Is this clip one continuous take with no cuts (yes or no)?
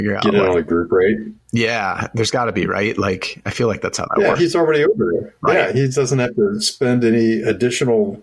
no